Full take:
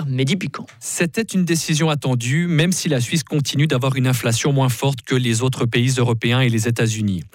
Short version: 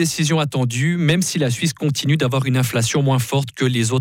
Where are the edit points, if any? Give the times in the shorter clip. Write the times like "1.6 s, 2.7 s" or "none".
none